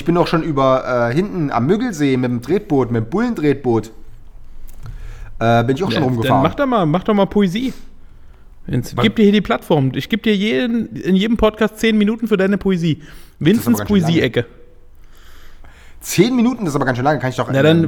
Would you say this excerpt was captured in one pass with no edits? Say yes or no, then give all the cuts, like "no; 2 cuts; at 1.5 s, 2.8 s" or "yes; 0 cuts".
no; 1 cut; at 9.0 s